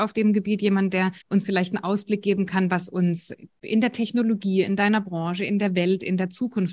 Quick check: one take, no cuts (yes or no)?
no